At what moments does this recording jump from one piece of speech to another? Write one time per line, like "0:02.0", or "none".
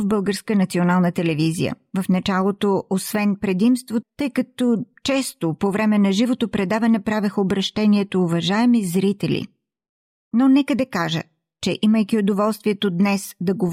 0:04.0